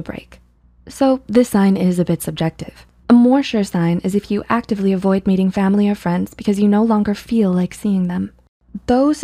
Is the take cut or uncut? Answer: cut